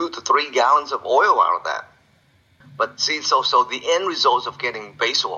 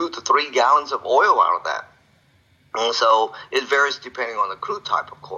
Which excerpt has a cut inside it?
first; 1 cut; at 2.6 s

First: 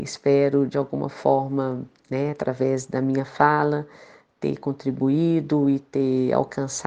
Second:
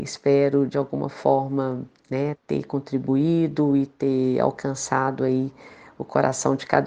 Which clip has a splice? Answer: second; 1 cut; at 2.3 s

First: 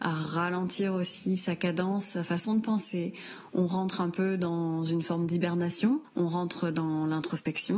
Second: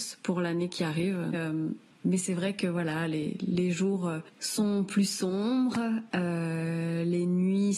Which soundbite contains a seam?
second; 1 cut; at 1.3 s

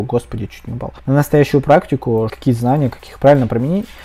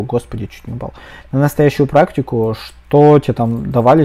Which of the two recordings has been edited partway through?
first; 2 cuts; at 1.0 s, 2.3 s

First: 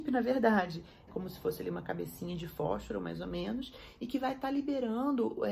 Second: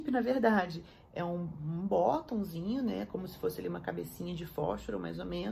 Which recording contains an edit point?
first; 1 cut; at 1.1 s

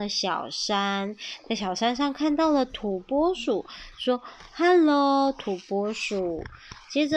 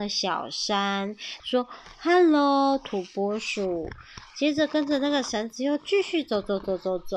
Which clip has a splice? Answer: second; 1 cut; at 1.4 s

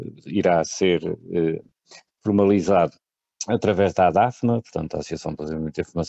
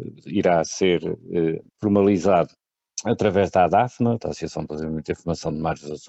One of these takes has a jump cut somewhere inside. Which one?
second; 2 cuts; at 1.7 s, 4.2 s

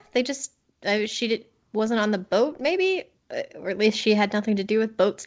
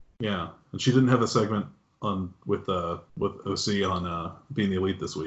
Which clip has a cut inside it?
second; 1 cut; at 3.1 s

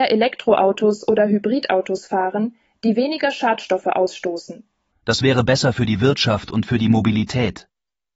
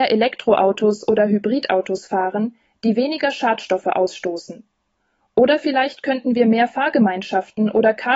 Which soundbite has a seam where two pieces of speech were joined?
first; 1 cut; at 4.9 s

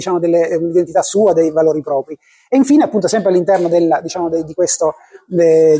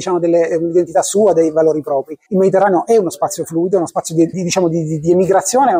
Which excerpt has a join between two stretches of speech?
second; 2 cuts; at 2.3 s, 4.3 s

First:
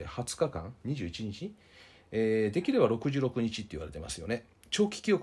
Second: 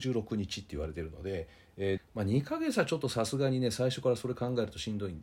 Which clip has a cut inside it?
second; 1 cut; at 2.0 s

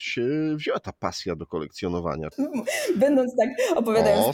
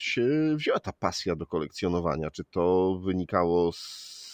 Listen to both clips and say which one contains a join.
first; 1 cut; at 2.3 s

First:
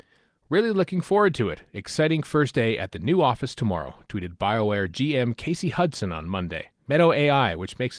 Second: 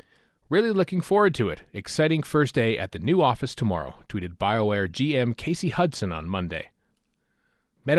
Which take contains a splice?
first; 1 cut; at 6.8 s

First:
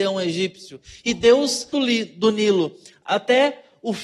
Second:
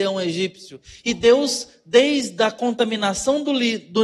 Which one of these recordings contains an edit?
first; 1 cut; at 1.7 s

